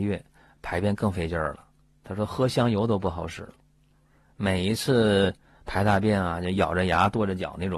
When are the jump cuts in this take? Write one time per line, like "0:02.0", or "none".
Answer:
none

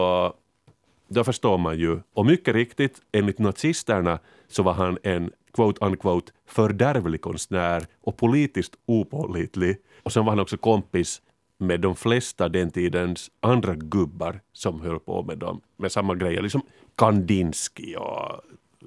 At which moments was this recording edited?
0:02.1
0:10.0

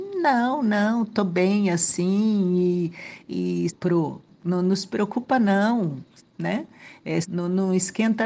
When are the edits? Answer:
0:03.7
0:06.2
0:07.2

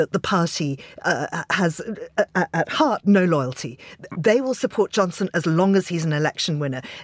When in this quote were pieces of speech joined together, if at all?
none

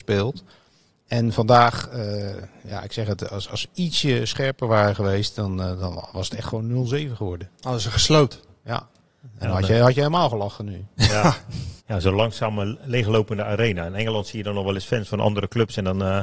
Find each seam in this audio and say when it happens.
0:11.8

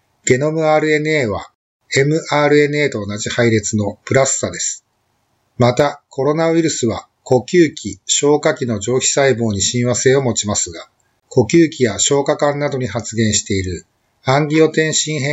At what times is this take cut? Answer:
0:11.2

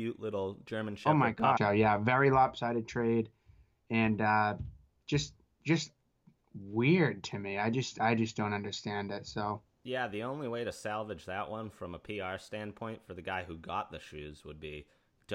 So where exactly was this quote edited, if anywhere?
0:01.6

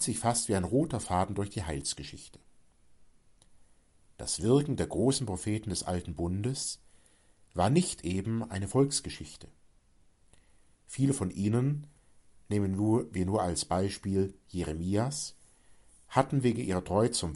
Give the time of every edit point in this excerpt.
none

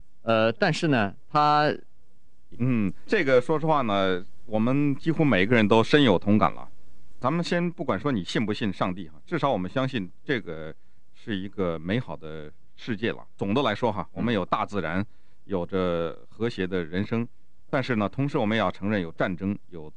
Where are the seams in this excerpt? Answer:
0:02.5

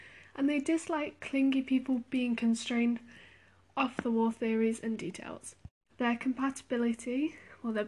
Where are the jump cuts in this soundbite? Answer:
0:05.9

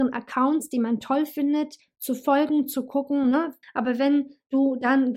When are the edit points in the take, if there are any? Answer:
0:03.6

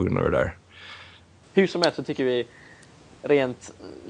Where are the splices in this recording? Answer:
0:01.4

